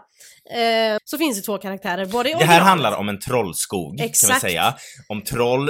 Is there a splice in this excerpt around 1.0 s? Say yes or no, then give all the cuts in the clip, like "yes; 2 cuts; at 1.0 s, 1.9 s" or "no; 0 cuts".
yes; 1 cut; at 1.0 s